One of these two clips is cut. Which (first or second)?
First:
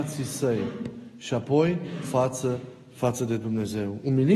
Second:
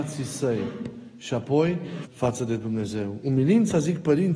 second